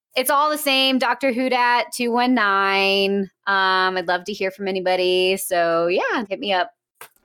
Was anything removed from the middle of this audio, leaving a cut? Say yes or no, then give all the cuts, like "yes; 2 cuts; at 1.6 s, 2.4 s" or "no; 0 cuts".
yes; 1 cut; at 6.3 s